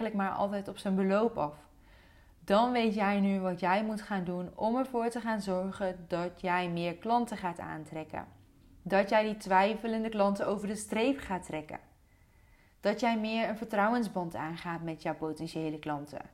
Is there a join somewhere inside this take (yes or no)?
no